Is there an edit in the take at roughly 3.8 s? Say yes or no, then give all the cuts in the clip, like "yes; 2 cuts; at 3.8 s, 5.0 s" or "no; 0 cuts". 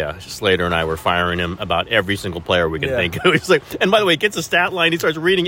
no; 0 cuts